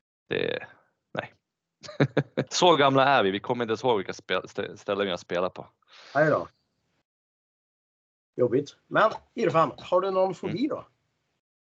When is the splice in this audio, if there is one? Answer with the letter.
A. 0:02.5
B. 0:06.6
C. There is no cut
A